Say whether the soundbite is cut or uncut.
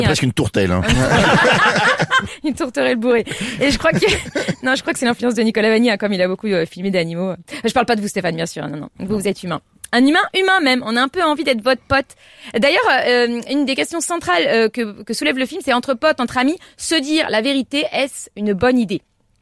uncut